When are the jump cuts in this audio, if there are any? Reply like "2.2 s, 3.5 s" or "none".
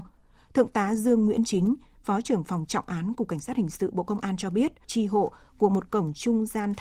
4.8 s